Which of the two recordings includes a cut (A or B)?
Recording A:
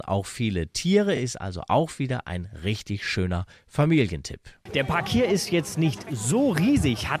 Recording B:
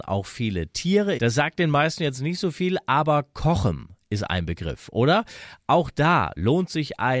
B